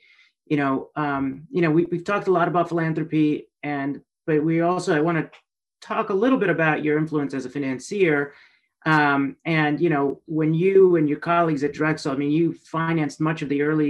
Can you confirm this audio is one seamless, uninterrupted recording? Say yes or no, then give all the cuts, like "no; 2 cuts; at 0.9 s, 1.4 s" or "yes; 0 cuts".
yes; 0 cuts